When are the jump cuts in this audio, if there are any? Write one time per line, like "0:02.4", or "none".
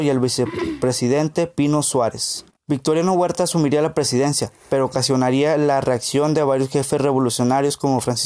0:02.6

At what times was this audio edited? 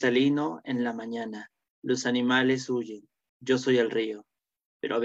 0:01.7
0:03.3

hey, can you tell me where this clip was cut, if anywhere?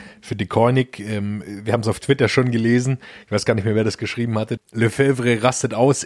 0:04.6

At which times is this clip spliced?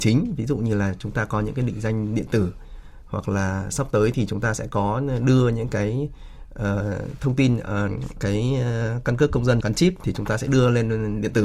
0:08.2
0:09.6

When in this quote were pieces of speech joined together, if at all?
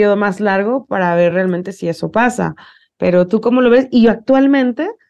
none

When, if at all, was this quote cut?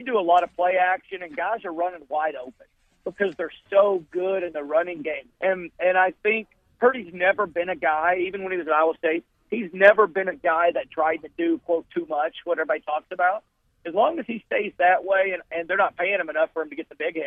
0:05.3

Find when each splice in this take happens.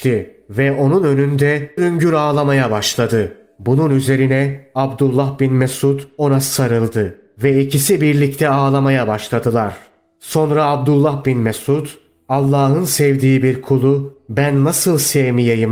0:01.8

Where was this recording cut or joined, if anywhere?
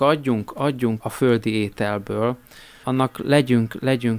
0:01.0
0:02.8

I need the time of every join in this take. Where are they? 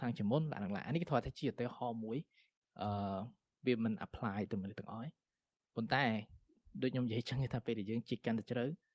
none

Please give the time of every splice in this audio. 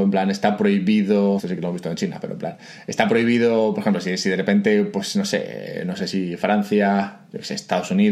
0:01.4

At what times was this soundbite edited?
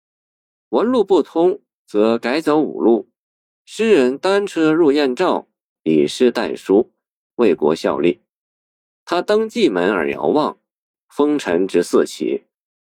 0:05.8
0:07.3
0:10.9

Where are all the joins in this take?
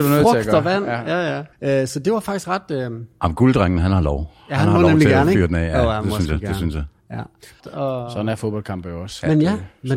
0:01.5
0:07.6

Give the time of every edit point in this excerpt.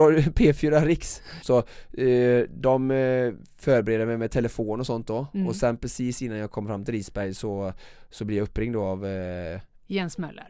0:01.4

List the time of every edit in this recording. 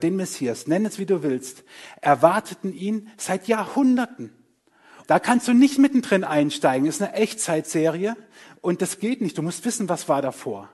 0:05.0

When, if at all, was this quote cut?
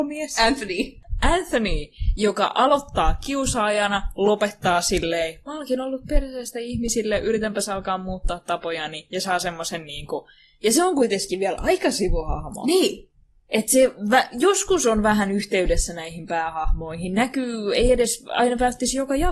none

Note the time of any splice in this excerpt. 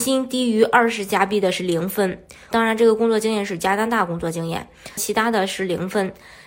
0:02.5
0:05.0

